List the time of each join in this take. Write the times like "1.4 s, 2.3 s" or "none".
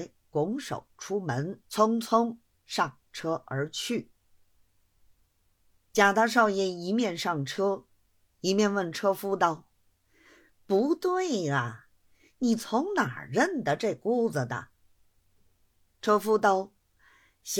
1.7 s